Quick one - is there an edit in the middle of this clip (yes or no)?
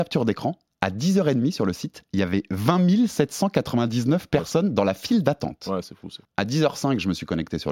yes